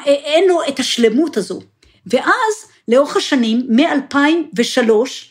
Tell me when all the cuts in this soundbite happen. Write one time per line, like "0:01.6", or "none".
none